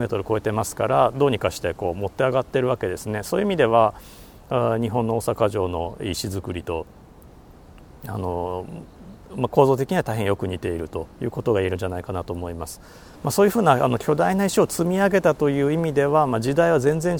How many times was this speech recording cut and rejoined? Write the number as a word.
one